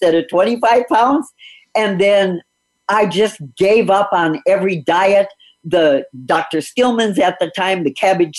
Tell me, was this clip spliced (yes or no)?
no